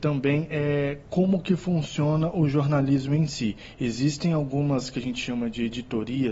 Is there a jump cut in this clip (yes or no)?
no